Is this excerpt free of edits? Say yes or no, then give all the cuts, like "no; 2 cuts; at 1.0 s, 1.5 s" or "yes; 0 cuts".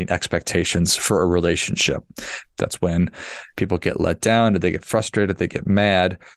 no; 1 cut; at 2.5 s